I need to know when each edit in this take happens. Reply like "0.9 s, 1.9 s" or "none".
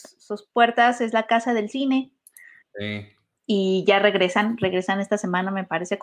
2.6 s

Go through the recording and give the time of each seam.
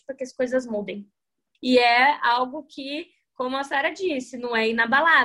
1.5 s

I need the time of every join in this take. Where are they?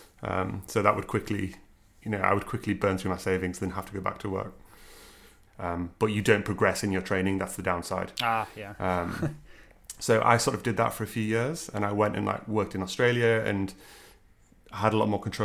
5.5 s

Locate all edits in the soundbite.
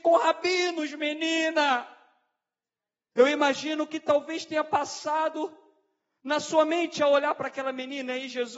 3.1 s

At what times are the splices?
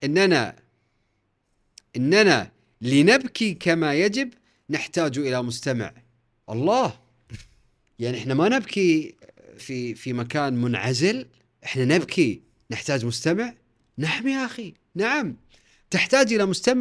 9.6 s, 14.8 s

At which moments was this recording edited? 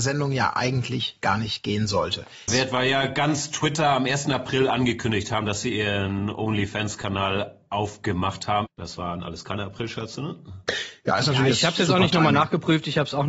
2.5 s, 8.7 s

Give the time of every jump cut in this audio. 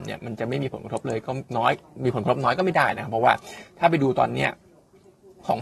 1.5 s

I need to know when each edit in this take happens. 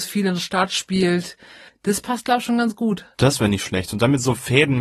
3.1 s

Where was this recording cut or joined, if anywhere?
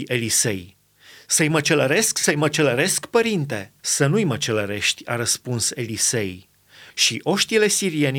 3.8 s, 6.9 s

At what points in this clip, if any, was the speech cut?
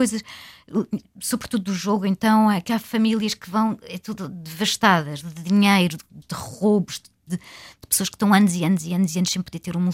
6.2 s, 7.3 s

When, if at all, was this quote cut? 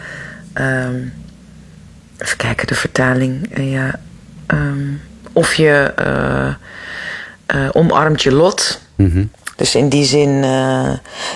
9.5 s

